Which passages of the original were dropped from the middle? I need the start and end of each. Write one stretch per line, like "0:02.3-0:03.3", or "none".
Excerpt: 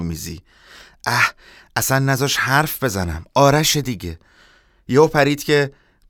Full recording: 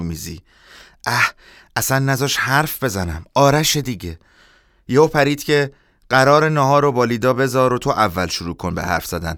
none